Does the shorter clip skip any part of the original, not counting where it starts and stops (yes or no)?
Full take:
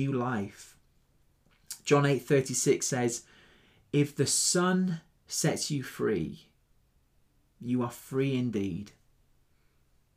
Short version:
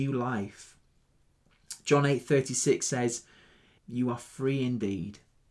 yes